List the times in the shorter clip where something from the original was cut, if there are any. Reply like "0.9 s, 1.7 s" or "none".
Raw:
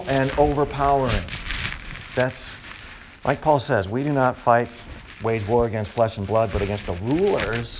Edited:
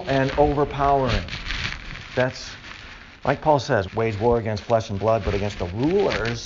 3.9 s